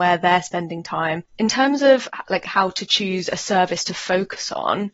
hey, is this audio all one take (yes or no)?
no